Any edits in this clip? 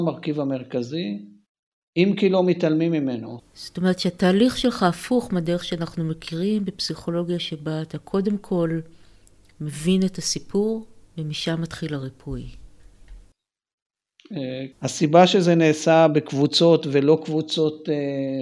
yes; 3 cuts; at 3.4 s, 11.0 s, 14.7 s

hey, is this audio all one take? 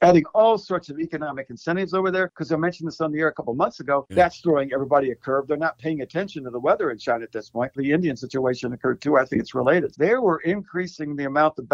no; 3 cuts; at 4.1 s, 7.8 s, 9.9 s

